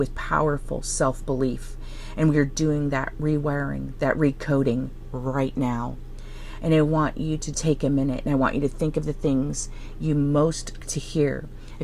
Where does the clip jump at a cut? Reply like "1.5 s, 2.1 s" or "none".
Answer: 7.5 s, 10.8 s